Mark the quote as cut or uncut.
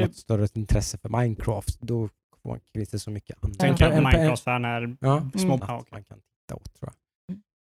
cut